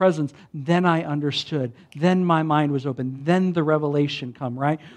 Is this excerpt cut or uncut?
uncut